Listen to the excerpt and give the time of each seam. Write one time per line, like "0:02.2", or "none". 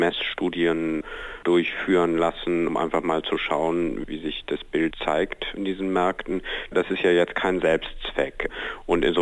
0:02.7